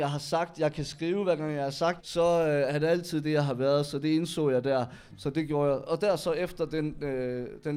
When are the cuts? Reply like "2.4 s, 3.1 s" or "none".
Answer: 2.0 s, 5.1 s